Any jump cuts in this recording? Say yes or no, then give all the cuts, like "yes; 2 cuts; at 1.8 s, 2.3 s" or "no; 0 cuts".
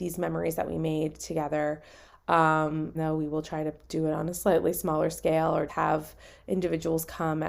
yes; 2 cuts; at 2.9 s, 5.7 s